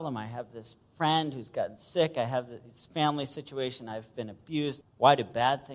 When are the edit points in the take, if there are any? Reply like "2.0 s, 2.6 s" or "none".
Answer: 4.8 s